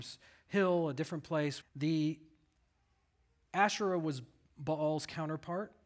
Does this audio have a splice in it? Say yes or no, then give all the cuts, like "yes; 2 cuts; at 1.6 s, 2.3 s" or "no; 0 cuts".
yes; 1 cut; at 1.6 s